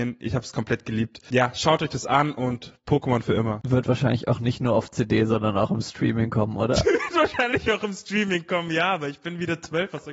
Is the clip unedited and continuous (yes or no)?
yes